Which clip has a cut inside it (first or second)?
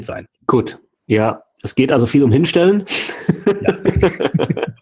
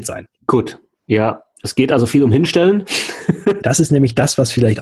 second